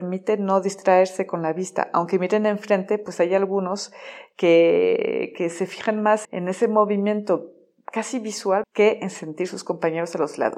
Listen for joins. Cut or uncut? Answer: cut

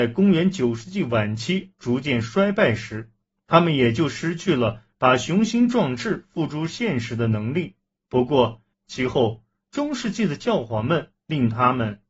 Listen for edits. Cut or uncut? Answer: cut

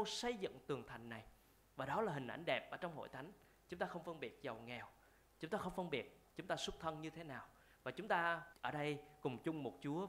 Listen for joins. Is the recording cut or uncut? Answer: cut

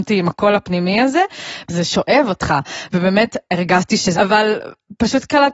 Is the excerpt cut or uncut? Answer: cut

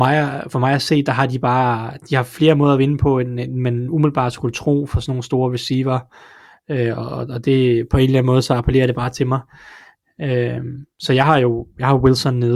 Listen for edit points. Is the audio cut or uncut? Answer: uncut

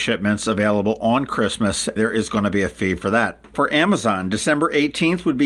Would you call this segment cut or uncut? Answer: cut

